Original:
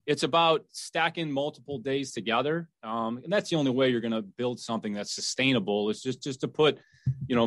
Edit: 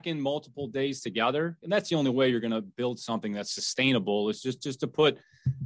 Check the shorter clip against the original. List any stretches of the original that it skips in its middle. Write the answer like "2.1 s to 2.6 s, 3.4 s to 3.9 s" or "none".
2.7 s to 3.2 s